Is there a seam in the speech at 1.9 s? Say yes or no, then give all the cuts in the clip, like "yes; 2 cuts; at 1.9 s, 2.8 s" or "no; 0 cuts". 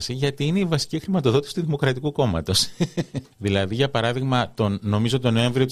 no; 1 cut; at 3.3 s